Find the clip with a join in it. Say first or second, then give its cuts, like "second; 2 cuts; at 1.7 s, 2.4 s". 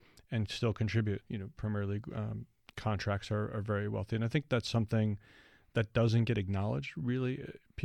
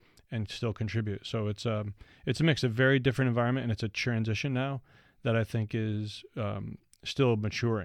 first; 1 cut; at 1.2 s